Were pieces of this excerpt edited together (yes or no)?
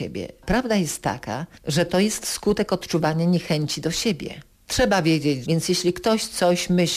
yes